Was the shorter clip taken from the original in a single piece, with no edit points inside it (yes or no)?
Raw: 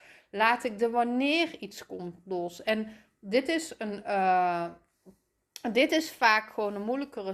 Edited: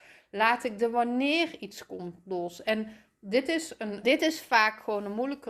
no